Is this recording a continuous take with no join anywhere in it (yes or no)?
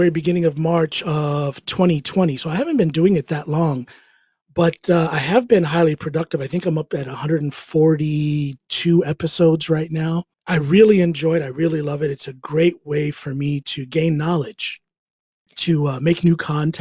no